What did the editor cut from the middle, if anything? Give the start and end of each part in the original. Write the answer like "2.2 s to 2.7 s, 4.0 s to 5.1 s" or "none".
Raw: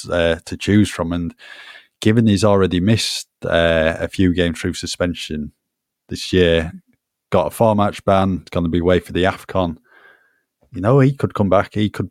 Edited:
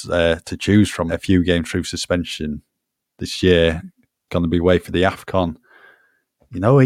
1.1 s to 4.0 s, 7.2 s to 8.5 s